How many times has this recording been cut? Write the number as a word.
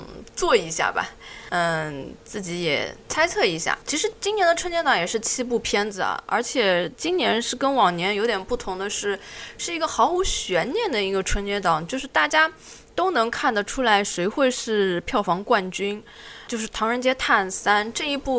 one